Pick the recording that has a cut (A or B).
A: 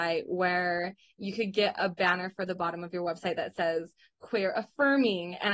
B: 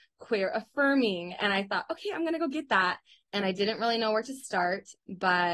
B